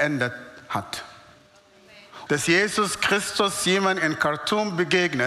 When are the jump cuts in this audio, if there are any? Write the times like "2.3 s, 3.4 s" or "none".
2.3 s